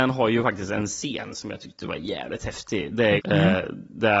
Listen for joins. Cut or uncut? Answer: cut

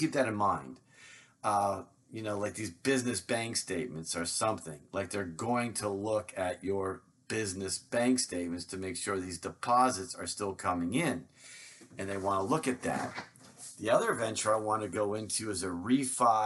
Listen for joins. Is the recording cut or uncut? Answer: uncut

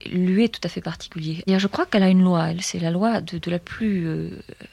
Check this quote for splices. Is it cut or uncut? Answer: cut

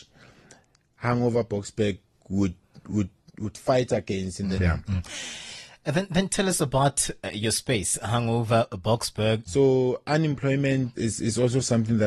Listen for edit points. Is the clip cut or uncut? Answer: cut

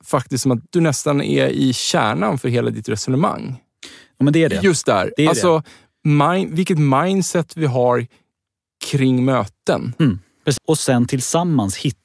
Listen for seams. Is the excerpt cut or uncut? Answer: cut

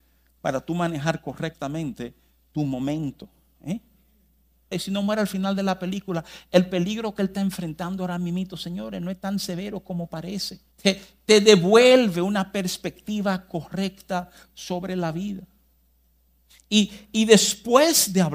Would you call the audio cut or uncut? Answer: cut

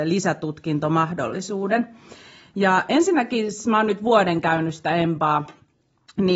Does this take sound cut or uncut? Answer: uncut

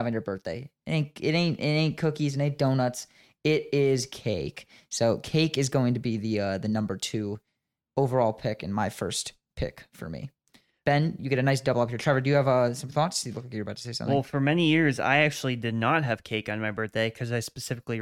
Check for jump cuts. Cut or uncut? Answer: uncut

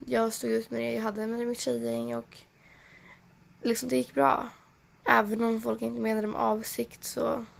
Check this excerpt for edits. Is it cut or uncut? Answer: cut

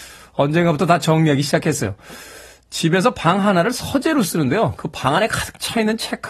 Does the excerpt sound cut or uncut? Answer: uncut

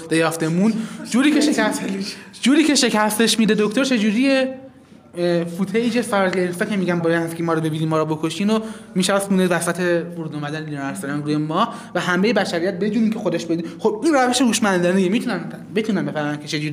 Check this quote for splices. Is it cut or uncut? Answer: cut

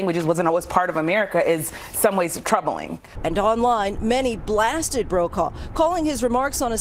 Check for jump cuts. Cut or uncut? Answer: uncut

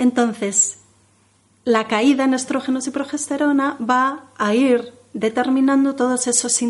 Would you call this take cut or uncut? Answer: uncut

